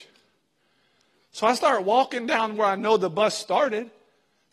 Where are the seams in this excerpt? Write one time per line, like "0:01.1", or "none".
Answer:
0:01.2